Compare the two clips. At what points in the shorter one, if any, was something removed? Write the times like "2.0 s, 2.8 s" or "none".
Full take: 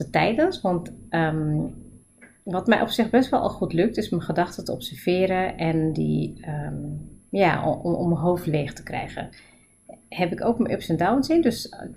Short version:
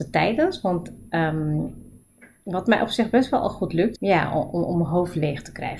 4.0 s